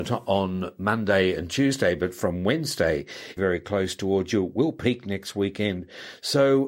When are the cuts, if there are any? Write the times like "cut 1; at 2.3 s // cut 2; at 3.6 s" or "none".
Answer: cut 1; at 3.4 s